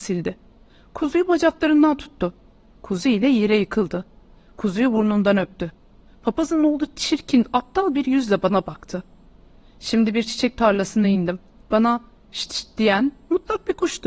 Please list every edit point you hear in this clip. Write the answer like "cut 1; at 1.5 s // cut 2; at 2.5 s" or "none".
none